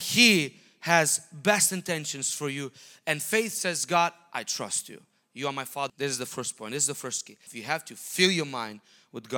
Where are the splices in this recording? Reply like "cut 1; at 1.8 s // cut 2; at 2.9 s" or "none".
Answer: cut 1; at 5.9 s // cut 2; at 7.5 s